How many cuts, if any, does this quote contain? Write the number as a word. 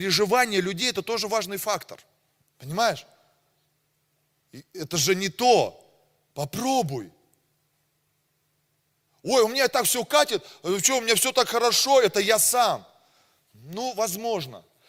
one